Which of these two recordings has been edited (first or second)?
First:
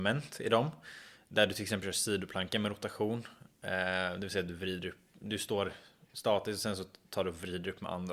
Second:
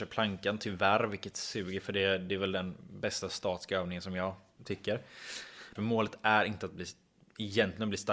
second